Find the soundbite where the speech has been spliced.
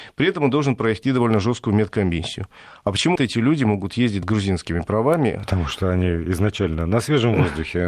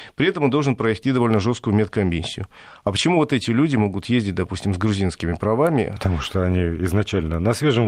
first; 2 cuts; at 3.2 s, 4.2 s

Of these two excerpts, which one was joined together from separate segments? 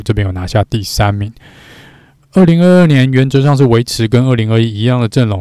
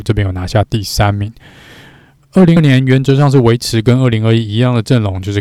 second; 1 cut; at 2.6 s

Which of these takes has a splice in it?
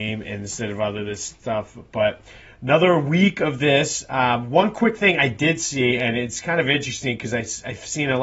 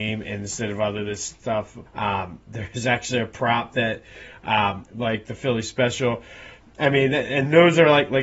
second; 3 cuts; at 1.9 s, 4.9 s, 6.6 s

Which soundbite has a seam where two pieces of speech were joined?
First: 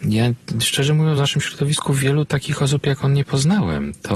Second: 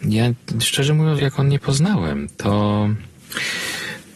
second; 1 cut; at 1.2 s

